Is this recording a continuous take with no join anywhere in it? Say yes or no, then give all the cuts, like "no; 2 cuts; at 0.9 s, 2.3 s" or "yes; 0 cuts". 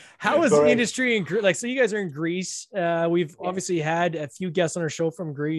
yes; 0 cuts